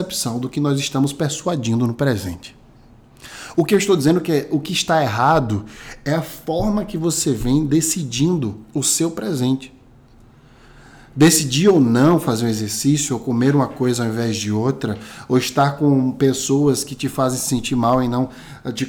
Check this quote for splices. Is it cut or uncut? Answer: uncut